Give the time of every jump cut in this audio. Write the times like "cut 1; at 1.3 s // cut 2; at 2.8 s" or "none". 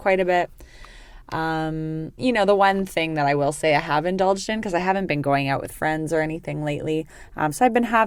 cut 1; at 2.2 s